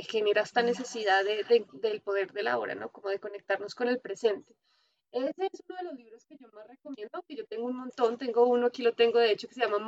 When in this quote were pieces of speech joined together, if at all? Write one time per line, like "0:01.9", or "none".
none